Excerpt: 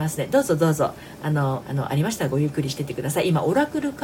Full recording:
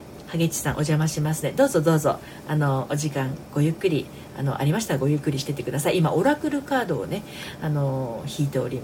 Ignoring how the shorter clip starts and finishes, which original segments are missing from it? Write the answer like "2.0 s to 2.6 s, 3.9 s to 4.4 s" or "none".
2.9 s to 4.3 s